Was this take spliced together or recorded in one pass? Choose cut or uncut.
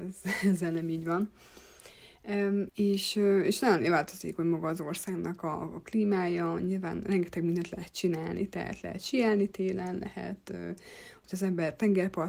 cut